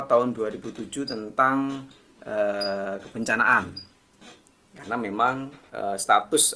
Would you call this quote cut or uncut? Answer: uncut